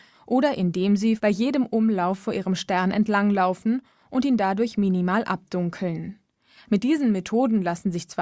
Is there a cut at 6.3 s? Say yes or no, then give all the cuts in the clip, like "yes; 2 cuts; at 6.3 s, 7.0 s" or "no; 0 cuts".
no; 1 cut; at 1.2 s